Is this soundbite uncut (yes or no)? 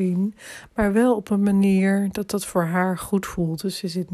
yes